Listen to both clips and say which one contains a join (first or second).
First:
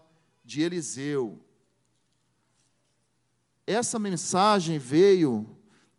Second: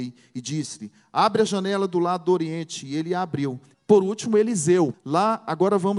second